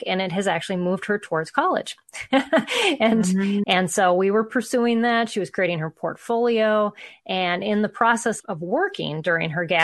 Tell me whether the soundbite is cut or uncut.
cut